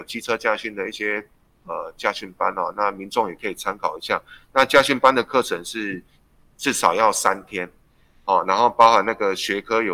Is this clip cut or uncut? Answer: uncut